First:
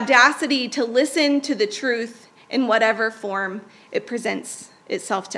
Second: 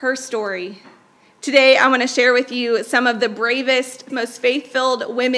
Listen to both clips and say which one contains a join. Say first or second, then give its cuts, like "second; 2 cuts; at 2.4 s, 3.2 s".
second; 2 cuts; at 1.3 s, 4.1 s